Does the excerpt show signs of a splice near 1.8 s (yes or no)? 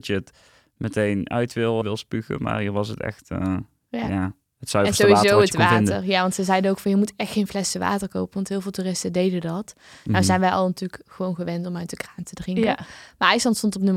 yes